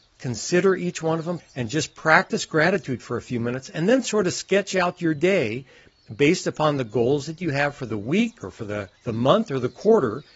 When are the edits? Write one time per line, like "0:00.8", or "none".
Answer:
0:01.4
0:09.0